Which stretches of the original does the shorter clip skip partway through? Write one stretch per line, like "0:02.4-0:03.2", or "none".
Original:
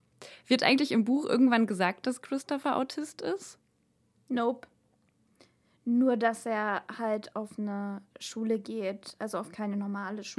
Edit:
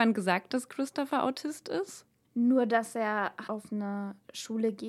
0:03.8-0:05.7
0:07.0-0:07.3